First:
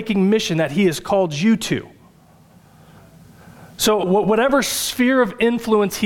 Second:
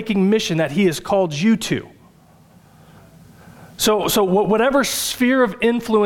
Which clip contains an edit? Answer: first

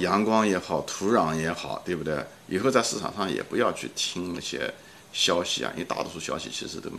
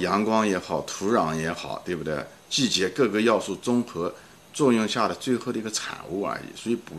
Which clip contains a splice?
first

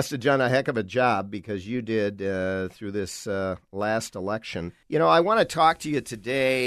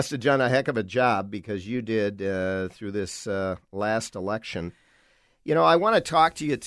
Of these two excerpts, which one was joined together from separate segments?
first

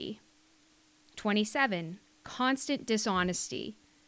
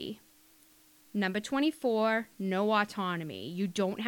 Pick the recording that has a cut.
first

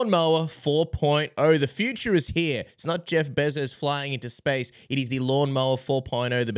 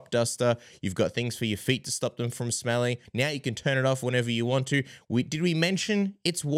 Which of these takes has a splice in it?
second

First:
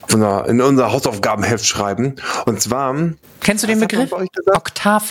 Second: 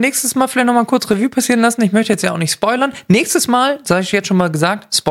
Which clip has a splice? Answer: first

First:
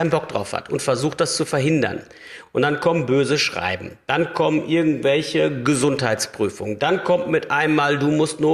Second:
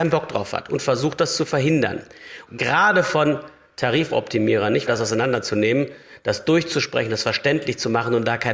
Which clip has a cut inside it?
second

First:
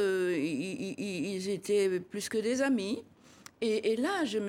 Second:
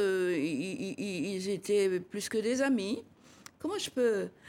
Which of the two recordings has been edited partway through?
second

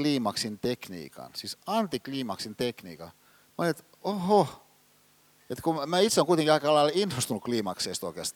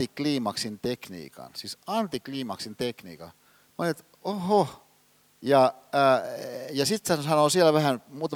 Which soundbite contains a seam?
second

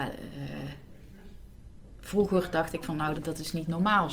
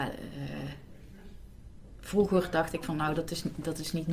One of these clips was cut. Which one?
first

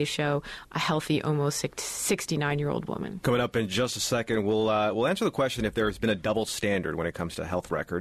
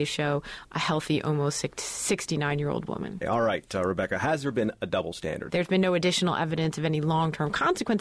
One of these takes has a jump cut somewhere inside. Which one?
second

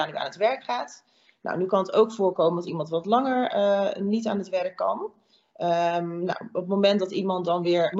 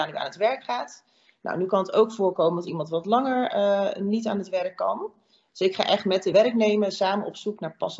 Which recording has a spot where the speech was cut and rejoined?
second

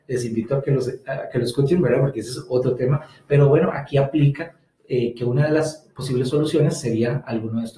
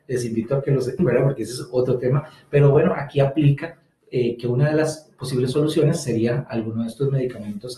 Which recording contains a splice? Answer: second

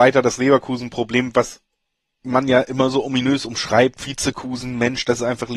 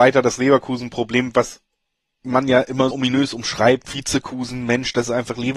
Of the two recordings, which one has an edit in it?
second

